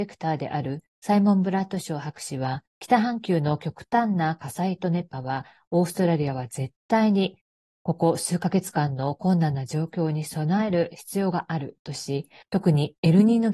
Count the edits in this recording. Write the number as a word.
zero